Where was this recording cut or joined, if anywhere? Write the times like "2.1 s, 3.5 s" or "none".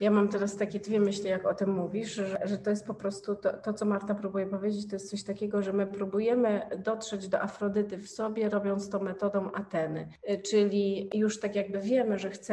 none